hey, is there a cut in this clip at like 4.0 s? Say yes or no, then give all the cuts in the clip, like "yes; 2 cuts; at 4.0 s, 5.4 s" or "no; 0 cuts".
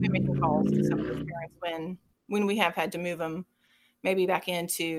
no; 1 cut; at 2.1 s